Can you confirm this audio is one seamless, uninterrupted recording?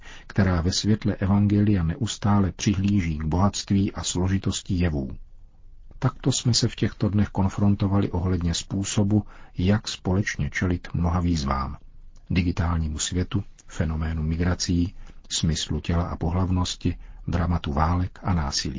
yes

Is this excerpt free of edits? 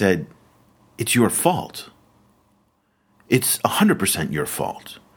yes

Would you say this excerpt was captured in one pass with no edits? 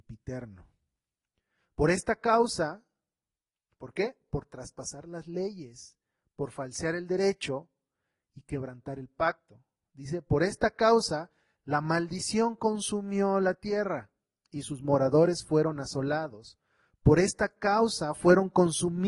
yes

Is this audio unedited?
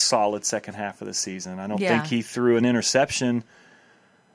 yes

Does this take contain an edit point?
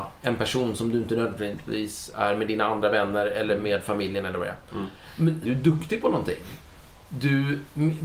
yes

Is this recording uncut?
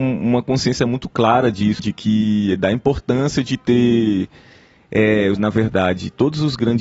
no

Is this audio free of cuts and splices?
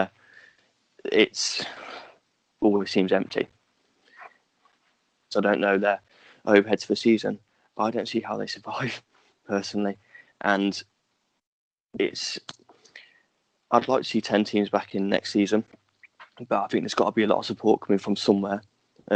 no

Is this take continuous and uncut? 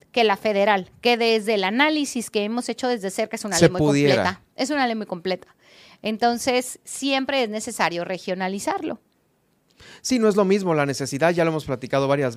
yes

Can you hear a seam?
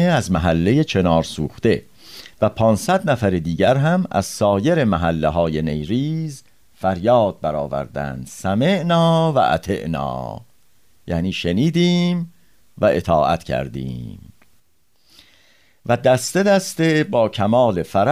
no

